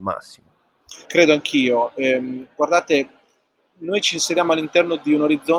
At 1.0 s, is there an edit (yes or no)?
no